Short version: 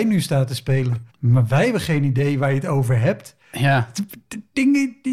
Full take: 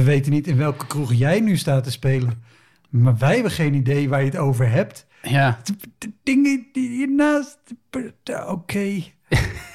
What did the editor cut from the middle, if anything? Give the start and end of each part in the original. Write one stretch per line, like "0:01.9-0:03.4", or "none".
0:02.5-0:02.8